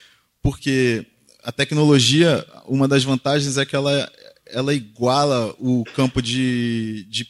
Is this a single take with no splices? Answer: yes; 0 cuts

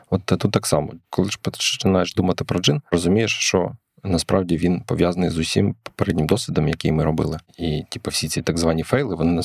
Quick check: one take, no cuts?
yes; 0 cuts

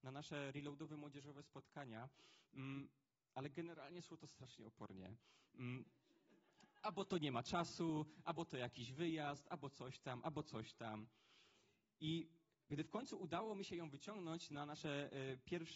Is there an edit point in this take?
no; 0 cuts

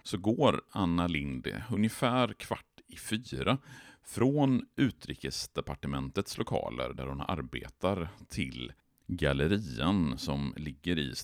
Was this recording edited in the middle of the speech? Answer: no; 0 cuts

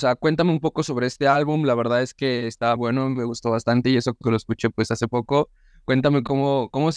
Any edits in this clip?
yes; 1 cut; at 2.8 s

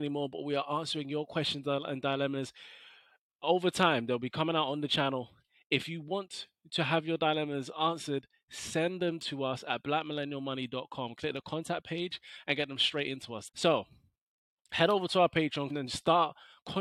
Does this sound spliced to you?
yes; 2 cuts; at 13.5 s, 15.7 s

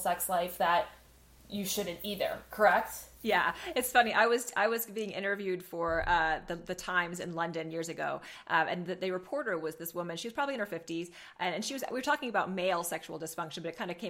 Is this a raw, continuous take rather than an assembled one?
yes; 0 cuts

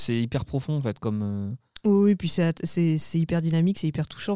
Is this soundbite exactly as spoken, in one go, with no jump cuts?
yes; 0 cuts

